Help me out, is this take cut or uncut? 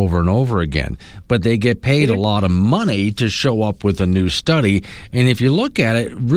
uncut